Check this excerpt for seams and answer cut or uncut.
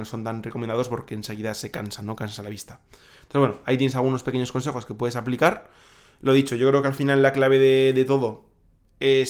uncut